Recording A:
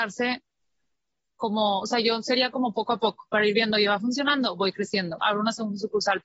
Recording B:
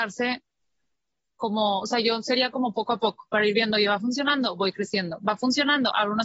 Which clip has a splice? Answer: A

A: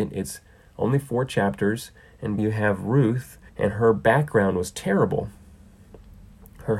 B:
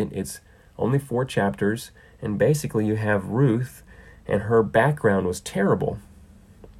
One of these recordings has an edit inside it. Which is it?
A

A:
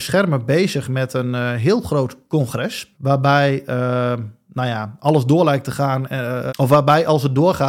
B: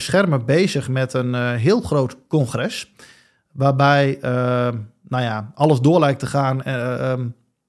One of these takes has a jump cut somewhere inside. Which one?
A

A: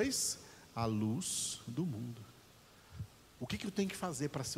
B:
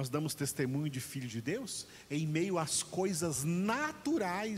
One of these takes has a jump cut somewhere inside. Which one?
A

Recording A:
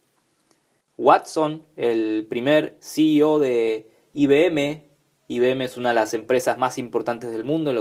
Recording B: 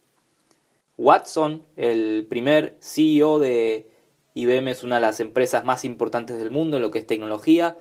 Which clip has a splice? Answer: B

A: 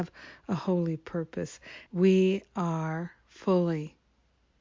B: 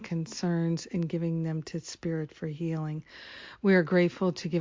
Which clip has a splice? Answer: A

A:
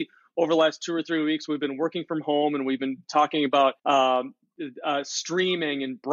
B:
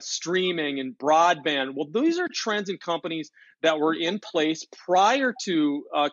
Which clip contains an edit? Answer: A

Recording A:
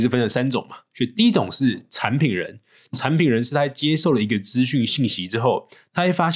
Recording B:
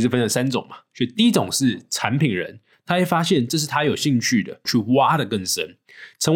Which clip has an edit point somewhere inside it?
B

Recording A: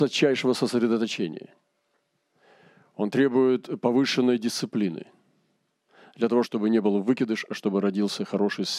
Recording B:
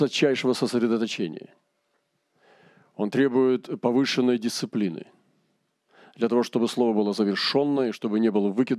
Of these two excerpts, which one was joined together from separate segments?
A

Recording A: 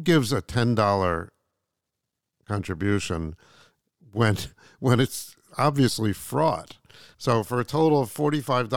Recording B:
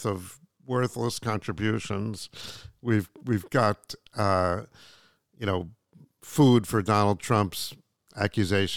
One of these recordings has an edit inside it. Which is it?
A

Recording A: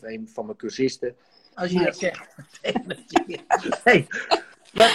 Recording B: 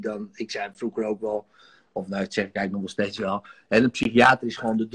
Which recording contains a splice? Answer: A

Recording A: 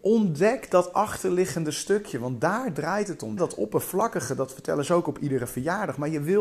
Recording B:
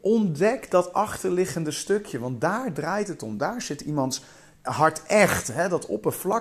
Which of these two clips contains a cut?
A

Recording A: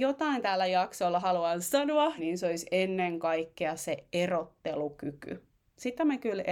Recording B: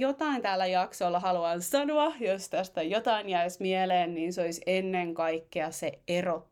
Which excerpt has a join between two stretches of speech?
A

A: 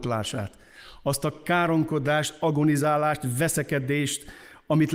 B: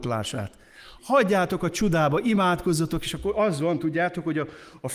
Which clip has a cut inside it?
B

